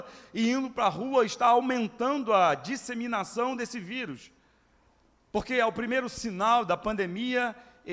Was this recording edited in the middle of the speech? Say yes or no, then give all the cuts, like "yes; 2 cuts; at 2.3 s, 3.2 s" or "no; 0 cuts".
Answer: yes; 1 cut; at 5.2 s